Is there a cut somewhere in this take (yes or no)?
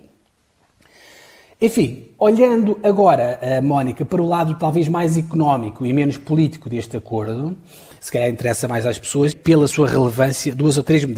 yes